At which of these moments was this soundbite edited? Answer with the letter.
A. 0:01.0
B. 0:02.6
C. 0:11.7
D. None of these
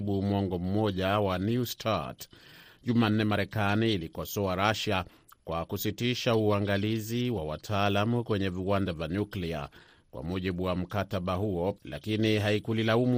C